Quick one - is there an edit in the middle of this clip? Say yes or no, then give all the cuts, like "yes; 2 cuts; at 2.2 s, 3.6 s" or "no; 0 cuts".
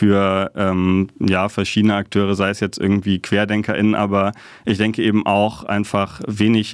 no; 0 cuts